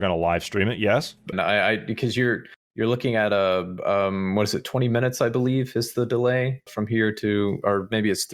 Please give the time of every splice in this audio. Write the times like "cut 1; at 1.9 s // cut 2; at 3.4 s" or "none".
cut 1; at 1.3 s // cut 2; at 6.7 s

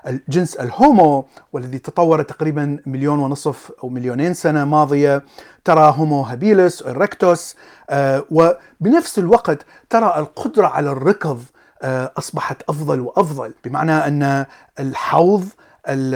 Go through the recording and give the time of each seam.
cut 1; at 13.6 s

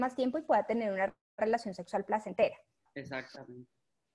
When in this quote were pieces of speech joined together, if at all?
cut 1; at 2.9 s

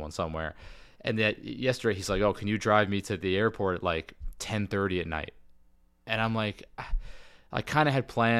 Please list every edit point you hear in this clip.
none

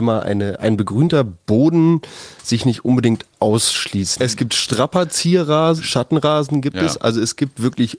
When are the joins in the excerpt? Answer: cut 1; at 4.2 s // cut 2; at 5.8 s

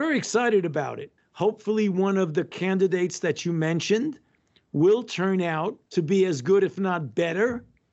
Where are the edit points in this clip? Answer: cut 1; at 1.2 s // cut 2; at 5.9 s

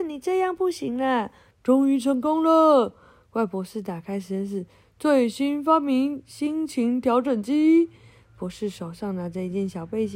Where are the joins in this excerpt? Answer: cut 1; at 1.5 s

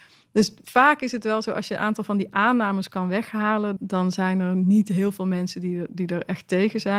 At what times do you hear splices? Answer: cut 1; at 3.8 s

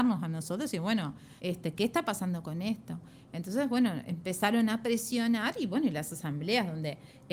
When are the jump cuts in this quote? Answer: cut 1; at 1.4 s

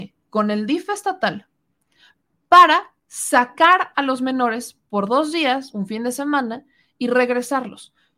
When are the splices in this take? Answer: none

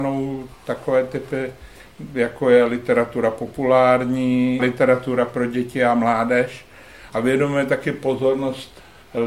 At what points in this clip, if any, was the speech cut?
cut 1; at 4.6 s

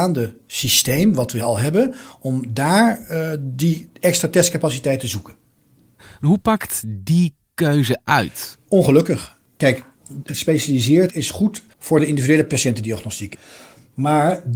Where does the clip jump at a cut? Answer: cut 1; at 10.3 s // cut 2; at 11.7 s

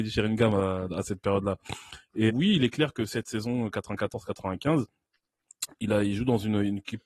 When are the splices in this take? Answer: cut 1; at 2.3 s

